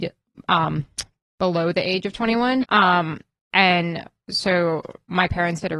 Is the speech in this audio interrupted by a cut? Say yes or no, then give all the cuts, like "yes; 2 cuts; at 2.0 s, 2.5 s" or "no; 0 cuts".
yes; 1 cut; at 2.6 s